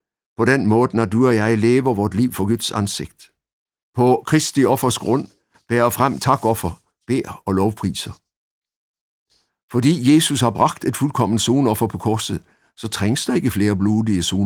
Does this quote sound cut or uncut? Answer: uncut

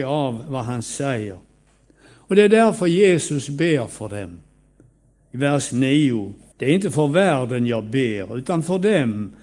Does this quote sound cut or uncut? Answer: cut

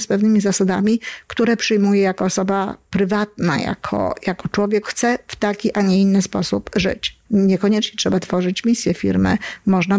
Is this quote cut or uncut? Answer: cut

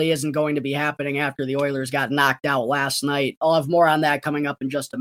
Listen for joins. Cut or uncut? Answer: uncut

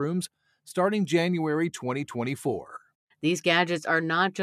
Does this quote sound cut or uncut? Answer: cut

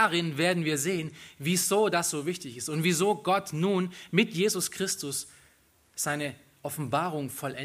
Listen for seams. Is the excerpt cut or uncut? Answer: uncut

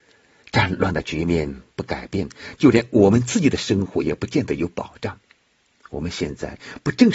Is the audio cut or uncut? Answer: uncut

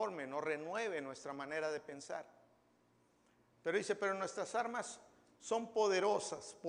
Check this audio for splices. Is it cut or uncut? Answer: cut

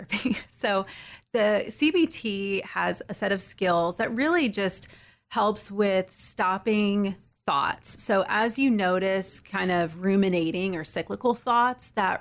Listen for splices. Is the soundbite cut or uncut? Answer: uncut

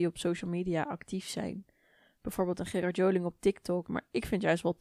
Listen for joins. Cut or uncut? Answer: cut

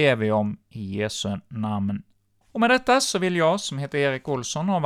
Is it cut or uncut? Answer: cut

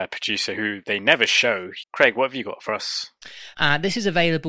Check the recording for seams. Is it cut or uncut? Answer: cut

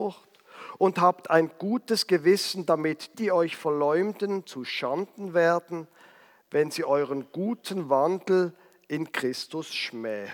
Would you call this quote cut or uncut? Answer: cut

